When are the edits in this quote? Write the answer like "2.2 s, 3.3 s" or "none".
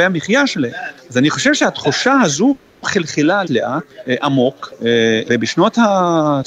3.4 s, 5.2 s